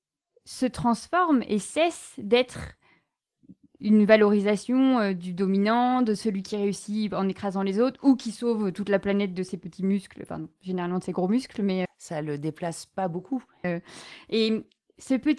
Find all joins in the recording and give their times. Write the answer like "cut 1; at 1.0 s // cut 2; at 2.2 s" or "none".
cut 1; at 11.8 s // cut 2; at 13.6 s